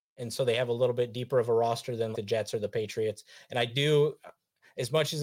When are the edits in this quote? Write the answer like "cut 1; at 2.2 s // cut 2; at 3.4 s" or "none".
cut 1; at 2.1 s